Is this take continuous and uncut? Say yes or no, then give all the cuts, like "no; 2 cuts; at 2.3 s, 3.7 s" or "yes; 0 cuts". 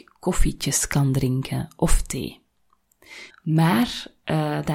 no; 1 cut; at 3.3 s